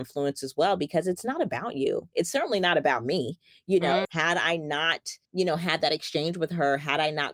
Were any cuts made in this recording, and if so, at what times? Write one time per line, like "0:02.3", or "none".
0:04.0
0:05.2